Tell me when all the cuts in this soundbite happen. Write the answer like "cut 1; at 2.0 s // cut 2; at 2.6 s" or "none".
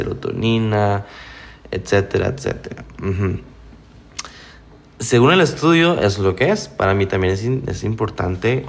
none